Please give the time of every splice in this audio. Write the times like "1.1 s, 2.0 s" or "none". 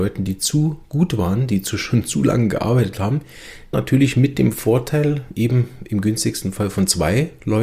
3.7 s